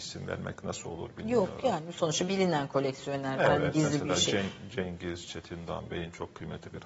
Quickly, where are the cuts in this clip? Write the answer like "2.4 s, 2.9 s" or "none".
none